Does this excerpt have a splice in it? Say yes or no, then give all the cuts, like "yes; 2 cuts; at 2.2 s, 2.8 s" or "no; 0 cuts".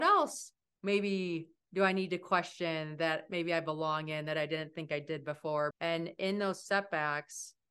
yes; 1 cut; at 5.7 s